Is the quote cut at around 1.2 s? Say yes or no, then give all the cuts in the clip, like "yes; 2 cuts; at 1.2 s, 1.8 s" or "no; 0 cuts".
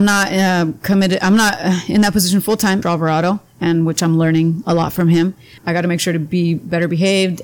no; 2 cuts; at 2.8 s, 5.6 s